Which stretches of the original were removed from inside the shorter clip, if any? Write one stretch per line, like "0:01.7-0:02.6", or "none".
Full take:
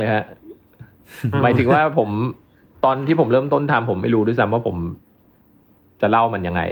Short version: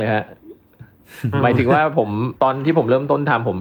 0:02.4-0:02.8